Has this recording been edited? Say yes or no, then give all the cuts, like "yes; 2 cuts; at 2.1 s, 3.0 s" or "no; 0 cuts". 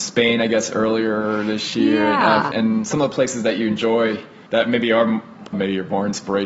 yes; 3 cuts; at 2.5 s, 4.5 s, 5.5 s